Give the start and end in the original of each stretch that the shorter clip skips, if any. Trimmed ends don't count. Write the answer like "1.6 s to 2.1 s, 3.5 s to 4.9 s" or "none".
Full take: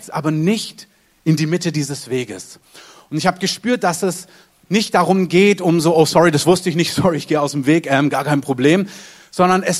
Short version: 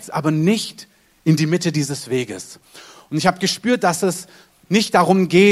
none